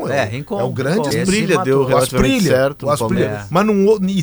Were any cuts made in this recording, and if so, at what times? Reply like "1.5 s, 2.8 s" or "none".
1.1 s